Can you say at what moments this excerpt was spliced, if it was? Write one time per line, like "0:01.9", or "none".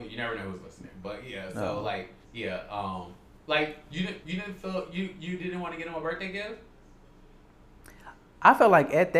0:02.2
0:04.2